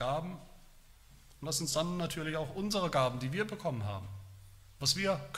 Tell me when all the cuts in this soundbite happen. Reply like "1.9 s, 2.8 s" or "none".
none